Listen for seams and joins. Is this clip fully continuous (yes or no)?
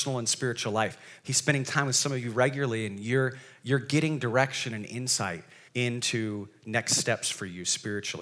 no